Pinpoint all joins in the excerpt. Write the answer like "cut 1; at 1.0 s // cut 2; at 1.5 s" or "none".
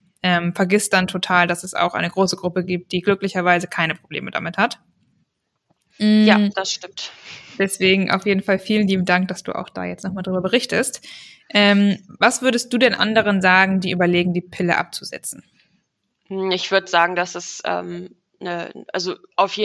none